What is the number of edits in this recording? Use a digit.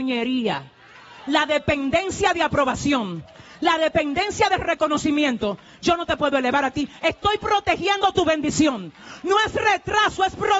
0